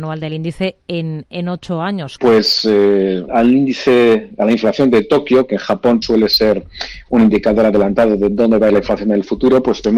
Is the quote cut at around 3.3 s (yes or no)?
yes